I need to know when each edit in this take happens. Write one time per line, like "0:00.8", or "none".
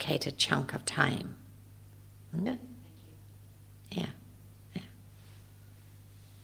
0:02.5